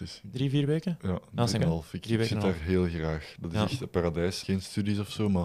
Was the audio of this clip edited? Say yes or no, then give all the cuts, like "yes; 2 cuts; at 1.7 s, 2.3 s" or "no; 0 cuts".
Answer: yes; 2 cuts; at 1.6 s, 4.4 s